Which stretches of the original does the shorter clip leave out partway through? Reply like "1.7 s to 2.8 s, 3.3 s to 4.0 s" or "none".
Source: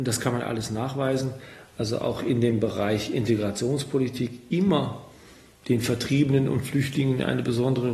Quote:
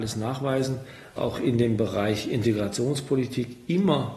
1.7 s to 2.0 s